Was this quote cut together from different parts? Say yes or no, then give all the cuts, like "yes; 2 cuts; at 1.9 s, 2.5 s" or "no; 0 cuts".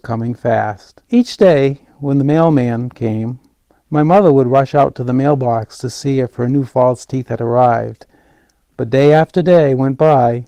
yes; 1 cut; at 1.1 s